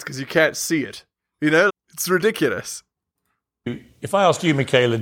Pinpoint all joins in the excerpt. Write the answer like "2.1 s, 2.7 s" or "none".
1.7 s